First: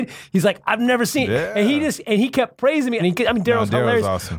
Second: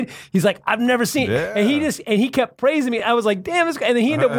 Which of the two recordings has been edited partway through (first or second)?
first